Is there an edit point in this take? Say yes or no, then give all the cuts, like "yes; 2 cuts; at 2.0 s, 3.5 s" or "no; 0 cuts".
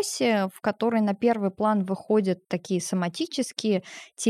no; 0 cuts